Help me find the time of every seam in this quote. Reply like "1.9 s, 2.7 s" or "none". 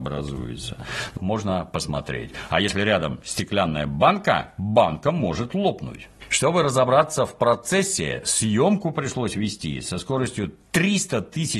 1.2 s, 6.3 s